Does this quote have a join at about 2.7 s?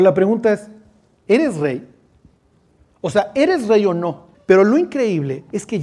no; 1 cut; at 4.3 s

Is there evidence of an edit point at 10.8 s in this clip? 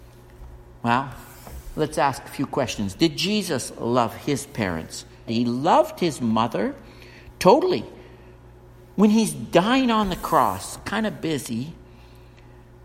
no; 1 cut; at 5.3 s

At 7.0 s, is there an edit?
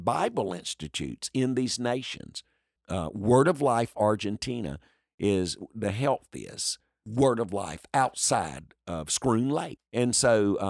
no; 2 cuts; at 2.8 s, 9.8 s

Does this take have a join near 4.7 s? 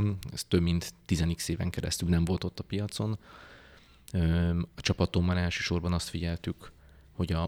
yes; 1 cut; at 4.7 s

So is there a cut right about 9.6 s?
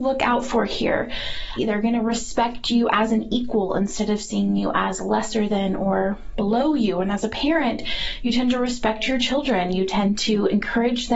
no; 1 cut; at 1.6 s

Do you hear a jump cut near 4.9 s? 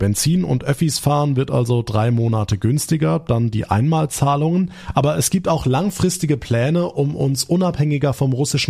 no; 0 cuts

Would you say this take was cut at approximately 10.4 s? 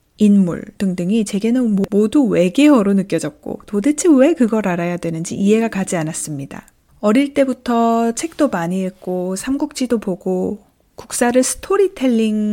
no; 1 cut; at 6.9 s

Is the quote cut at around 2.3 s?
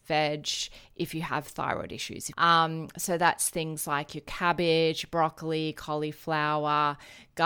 yes; 1 cut; at 2.3 s

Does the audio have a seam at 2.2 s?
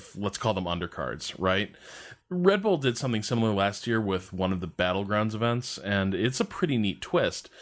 yes; 1 cut; at 2.2 s

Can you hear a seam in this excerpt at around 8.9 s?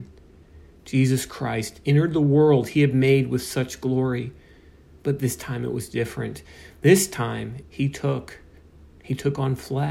no; 1 cut; at 7.6 s

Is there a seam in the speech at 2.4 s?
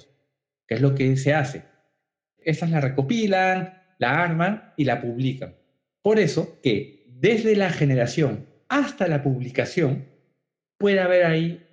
yes; 1 cut; at 2.4 s

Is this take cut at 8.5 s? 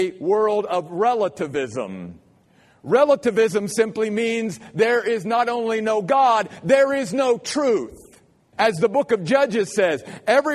yes; 1 cut; at 8.5 s

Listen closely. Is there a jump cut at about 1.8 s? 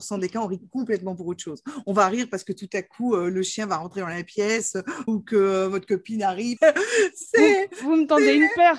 no; 2 cuts; at 5.1 s, 6.6 s

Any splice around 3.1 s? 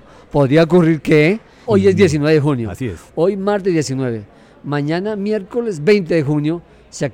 no; 1 cut; at 1.6 s

